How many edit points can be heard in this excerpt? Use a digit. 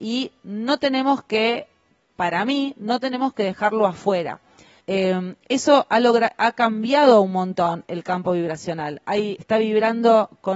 2